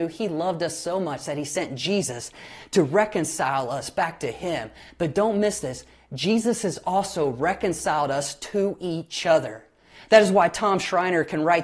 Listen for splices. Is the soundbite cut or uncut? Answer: uncut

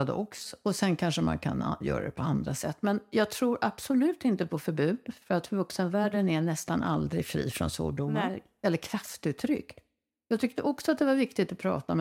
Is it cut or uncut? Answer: uncut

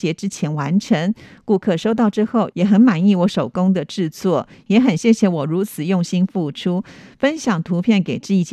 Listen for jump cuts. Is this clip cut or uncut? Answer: uncut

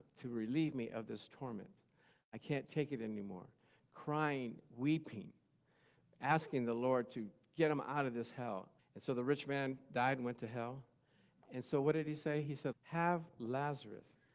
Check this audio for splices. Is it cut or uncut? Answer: cut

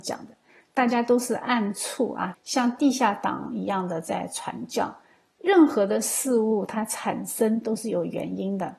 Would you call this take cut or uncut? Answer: cut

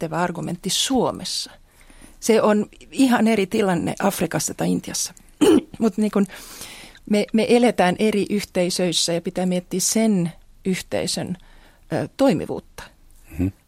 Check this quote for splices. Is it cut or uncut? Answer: uncut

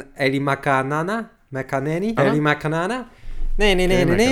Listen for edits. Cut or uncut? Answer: cut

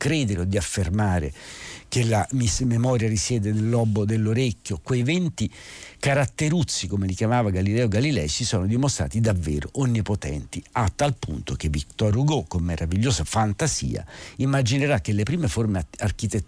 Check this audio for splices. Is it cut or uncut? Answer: uncut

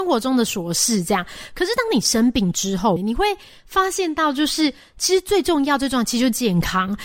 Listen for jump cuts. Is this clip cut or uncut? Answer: cut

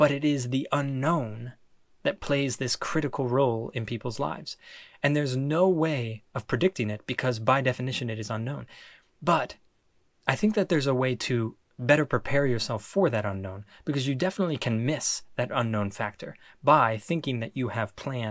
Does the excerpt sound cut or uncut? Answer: uncut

